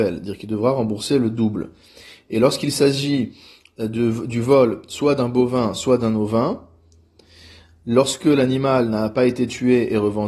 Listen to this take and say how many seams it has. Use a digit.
0